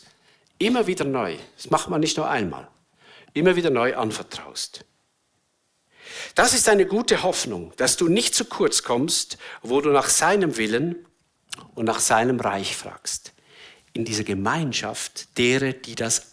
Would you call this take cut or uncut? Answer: uncut